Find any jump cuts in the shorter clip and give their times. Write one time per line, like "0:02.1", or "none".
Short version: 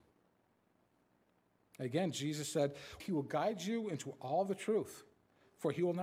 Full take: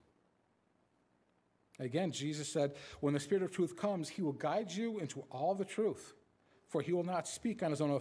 0:03.0

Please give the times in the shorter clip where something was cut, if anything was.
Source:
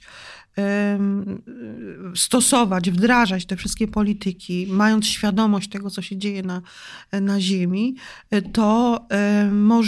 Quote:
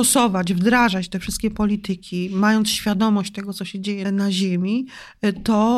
0:04.0

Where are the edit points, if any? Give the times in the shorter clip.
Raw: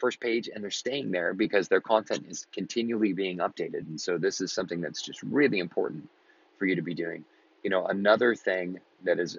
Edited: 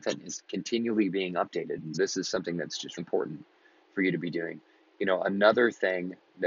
0:01.9
0:03.0

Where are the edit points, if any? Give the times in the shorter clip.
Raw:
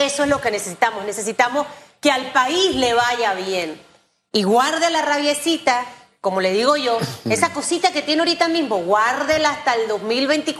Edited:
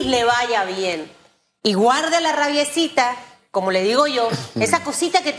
none

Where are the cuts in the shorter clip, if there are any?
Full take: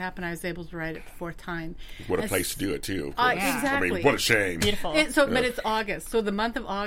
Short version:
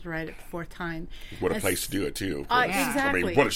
none

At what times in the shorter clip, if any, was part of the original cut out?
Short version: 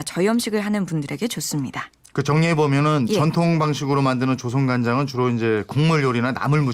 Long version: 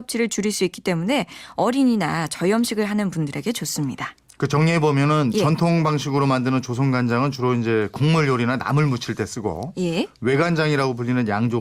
none

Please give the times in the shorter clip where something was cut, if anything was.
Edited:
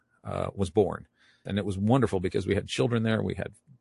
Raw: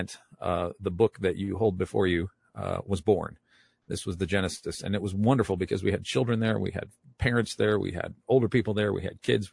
0:01.5

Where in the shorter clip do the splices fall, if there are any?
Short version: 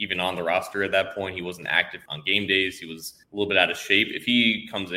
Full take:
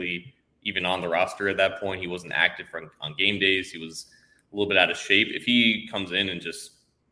0:02.1
0:03.2

